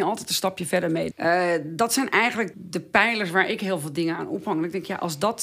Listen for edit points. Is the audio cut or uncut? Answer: cut